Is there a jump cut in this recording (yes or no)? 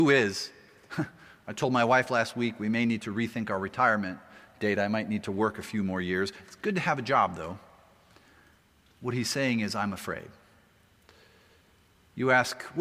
no